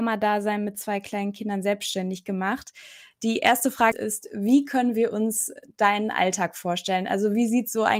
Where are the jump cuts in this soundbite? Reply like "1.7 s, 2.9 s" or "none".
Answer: 3.9 s

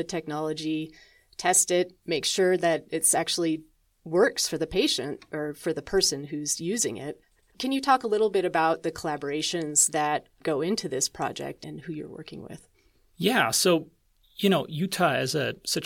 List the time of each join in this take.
11.6 s

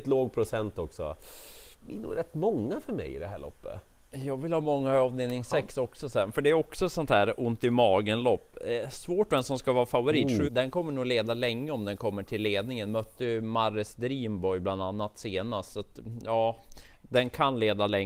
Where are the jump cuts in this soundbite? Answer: 1.7 s, 10.4 s

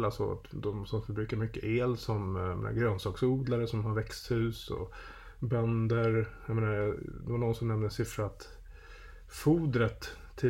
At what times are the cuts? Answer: none

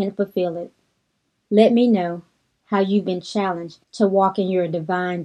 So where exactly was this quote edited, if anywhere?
1.4 s, 3.8 s

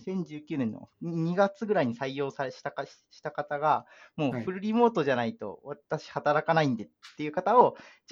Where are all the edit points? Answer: 0.9 s

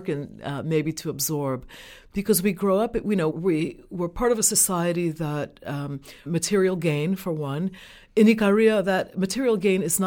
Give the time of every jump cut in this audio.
3.3 s, 6.3 s

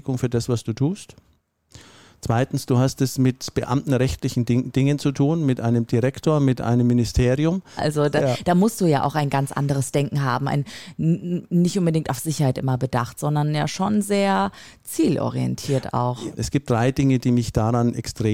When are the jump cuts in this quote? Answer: 7.8 s, 16.4 s

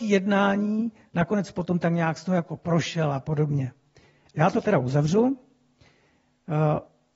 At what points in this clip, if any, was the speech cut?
4.3 s

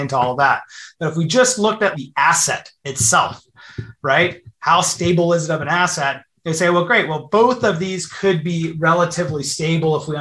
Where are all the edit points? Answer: 1.9 s

